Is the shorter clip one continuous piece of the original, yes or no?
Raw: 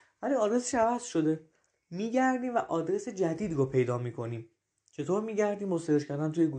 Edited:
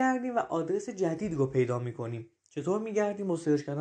no